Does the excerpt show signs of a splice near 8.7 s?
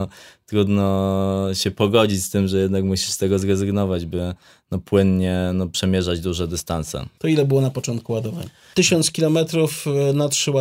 yes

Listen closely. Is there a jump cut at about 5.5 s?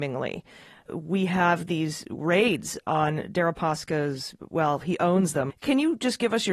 yes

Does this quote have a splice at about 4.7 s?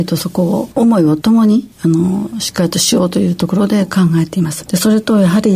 yes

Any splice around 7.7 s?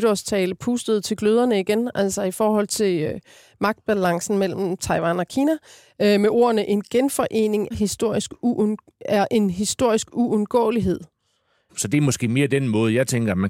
yes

